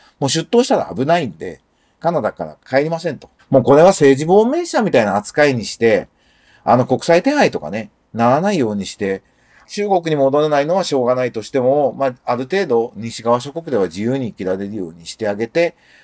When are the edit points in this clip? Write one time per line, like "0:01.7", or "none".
0:03.4